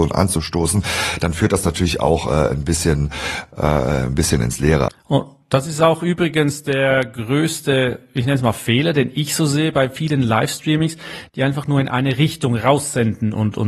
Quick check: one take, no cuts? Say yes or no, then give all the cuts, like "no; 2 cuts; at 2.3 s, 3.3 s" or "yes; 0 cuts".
no; 1 cut; at 4.9 s